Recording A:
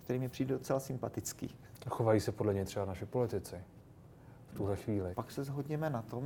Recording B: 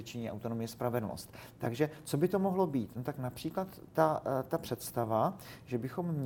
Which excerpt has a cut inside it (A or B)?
A